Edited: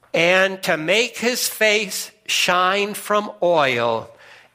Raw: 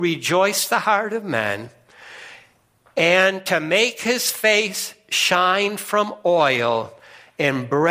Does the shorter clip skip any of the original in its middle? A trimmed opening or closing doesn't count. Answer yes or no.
no